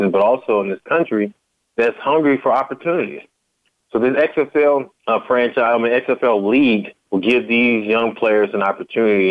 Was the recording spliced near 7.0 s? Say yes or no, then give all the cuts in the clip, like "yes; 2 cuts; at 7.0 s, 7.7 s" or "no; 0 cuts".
yes; 2 cuts; at 5.0 s, 7.0 s